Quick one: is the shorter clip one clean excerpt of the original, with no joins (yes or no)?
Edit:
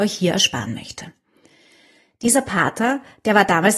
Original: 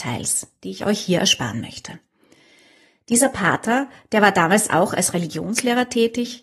yes